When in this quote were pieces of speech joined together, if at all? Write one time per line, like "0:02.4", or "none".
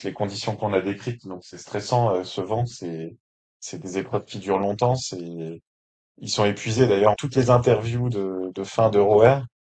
0:07.1